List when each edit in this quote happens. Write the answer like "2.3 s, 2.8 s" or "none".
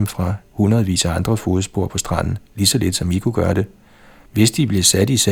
4.3 s